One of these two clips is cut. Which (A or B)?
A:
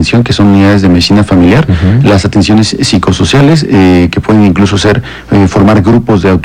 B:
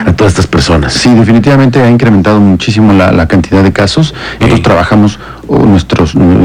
B